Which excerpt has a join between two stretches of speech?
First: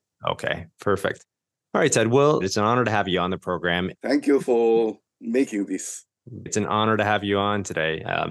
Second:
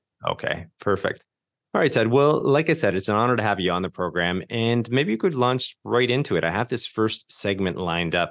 first; 3 cuts; at 2.4 s, 3.9 s, 6.5 s

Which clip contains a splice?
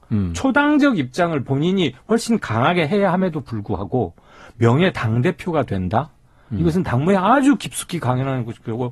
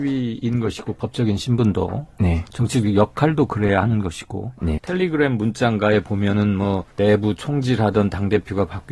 second; 2 cuts; at 4.8 s, 6.9 s

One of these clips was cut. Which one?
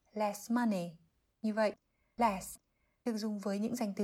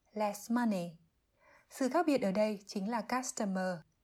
first; 1 cut; at 1.3 s

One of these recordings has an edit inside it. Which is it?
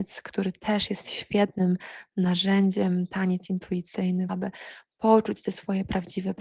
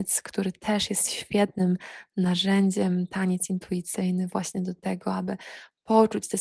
first; 1 cut; at 4.3 s

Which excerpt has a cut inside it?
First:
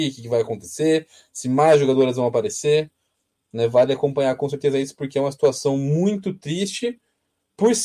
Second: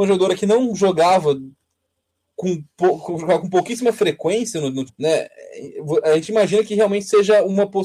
second; 1 cut; at 4.9 s

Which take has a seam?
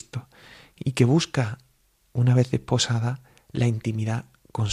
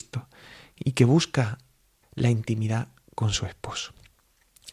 second; 1 cut; at 2.0 s

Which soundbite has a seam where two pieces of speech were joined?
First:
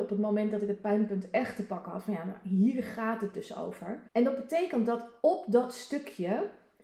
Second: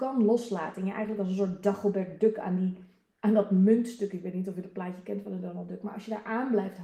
first; 1 cut; at 4.1 s

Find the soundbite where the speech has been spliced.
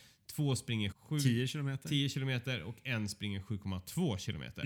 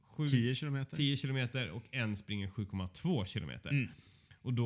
first; 1 cut; at 0.9 s

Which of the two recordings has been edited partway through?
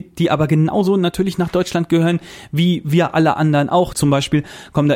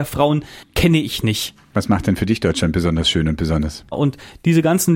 second; 2 cuts; at 1.7 s, 3.9 s

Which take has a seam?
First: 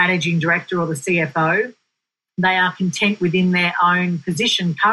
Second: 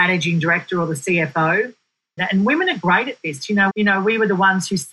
second; 2 cuts; at 2.2 s, 3.7 s

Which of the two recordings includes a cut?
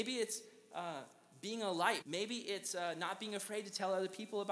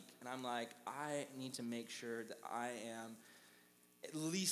first; 1 cut; at 2.0 s

